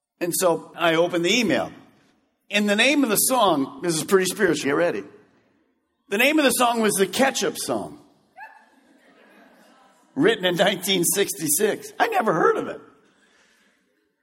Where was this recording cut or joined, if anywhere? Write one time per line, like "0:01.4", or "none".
0:04.6